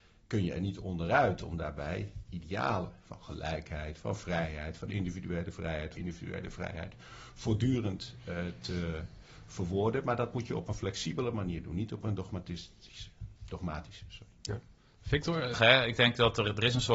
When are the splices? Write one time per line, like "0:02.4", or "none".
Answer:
0:06.0
0:15.5